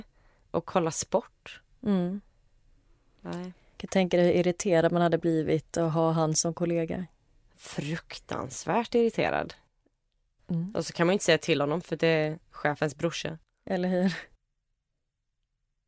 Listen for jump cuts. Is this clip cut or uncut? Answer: uncut